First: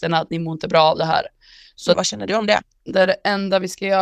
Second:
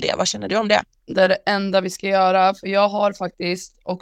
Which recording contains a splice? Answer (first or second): first